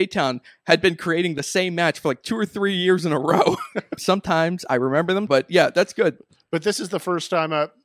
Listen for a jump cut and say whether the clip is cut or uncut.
cut